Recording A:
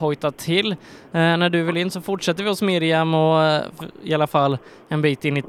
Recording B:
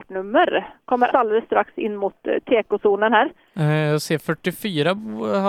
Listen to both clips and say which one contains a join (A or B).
B